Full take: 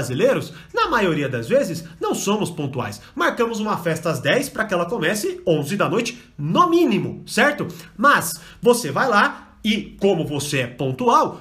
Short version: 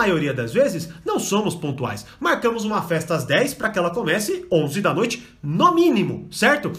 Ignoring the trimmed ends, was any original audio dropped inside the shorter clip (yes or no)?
no